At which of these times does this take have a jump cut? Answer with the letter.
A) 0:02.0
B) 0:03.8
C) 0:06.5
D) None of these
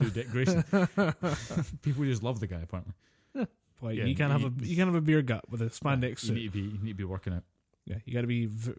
B